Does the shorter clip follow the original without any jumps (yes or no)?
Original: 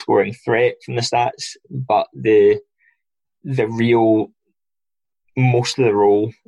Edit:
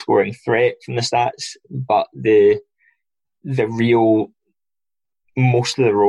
yes